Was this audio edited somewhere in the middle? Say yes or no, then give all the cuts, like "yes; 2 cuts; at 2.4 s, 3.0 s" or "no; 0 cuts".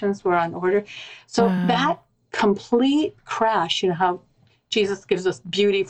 no; 0 cuts